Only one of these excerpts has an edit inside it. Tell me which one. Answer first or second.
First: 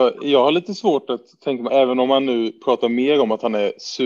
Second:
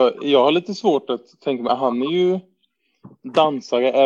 first